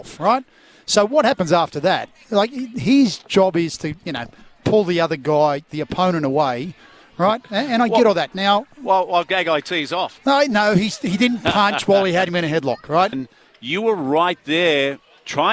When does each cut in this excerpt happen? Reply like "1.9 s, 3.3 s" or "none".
13.1 s